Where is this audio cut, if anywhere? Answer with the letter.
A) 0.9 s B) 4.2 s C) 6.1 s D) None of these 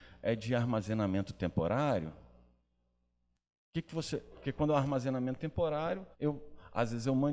C